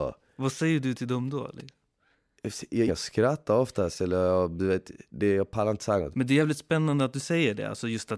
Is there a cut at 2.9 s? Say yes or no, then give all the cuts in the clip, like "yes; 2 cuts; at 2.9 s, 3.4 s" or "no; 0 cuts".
yes; 2 cuts; at 2.9 s, 6.1 s